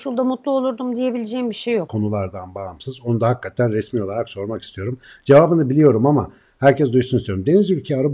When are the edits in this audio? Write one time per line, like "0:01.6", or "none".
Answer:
0:01.9

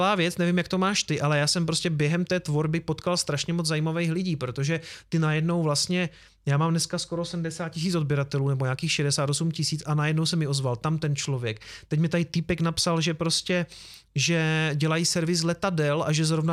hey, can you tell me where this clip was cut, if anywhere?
none

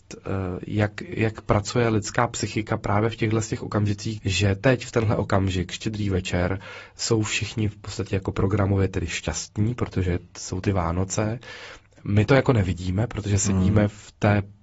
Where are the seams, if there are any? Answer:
0:04.2

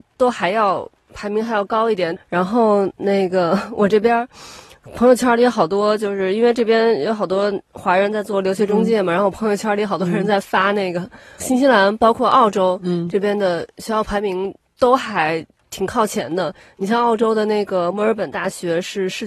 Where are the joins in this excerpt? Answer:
0:02.2
0:11.4

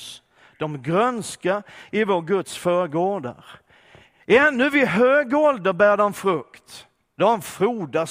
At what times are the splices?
none

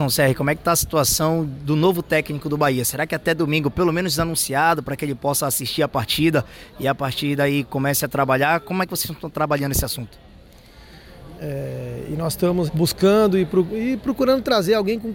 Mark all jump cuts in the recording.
0:11.4
0:12.7

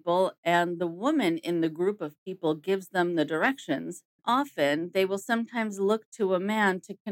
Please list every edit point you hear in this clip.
0:04.2

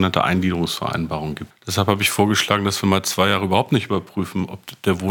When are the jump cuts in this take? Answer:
0:01.5

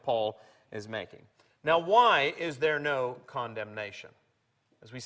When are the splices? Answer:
none

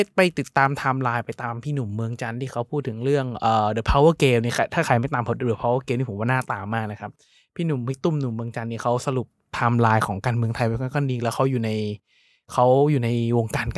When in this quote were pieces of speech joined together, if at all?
none

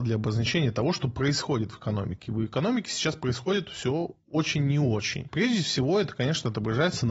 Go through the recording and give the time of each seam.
none

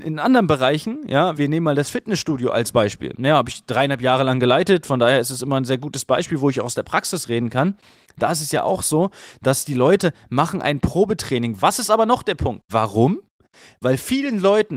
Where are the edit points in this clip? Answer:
0:01.3
0:11.6
0:12.7

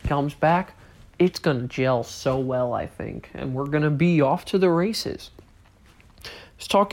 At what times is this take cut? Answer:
none

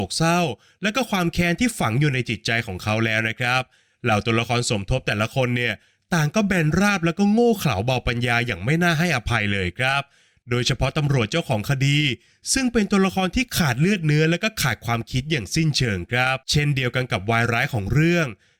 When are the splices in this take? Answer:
0:16.4

